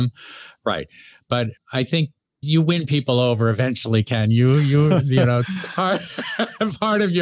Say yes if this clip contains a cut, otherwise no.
no